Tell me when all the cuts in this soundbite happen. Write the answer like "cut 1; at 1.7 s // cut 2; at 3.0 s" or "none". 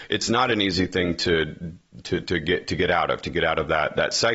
none